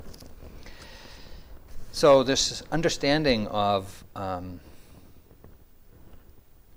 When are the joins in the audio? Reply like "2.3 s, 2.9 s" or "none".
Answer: none